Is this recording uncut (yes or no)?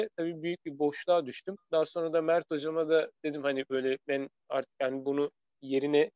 no